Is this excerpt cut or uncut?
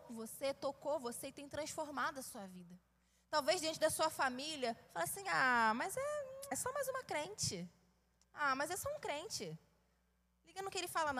cut